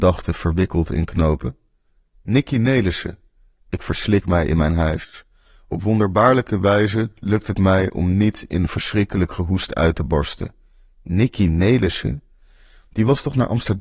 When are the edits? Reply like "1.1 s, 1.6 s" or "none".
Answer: none